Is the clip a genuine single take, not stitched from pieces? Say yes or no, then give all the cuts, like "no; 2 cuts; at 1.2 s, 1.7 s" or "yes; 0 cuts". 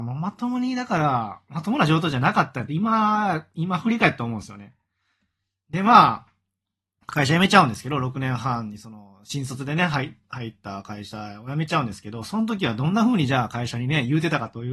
yes; 0 cuts